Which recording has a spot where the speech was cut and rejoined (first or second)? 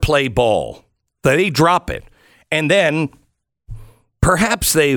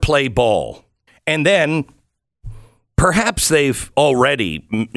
second